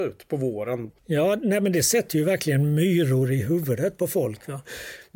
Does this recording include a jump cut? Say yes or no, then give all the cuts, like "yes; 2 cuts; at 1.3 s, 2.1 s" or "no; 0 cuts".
yes; 1 cut; at 1.0 s